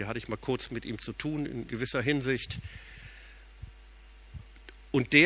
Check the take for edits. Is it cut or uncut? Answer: cut